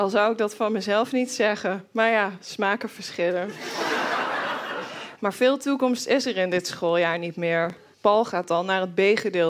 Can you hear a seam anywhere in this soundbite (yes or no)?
yes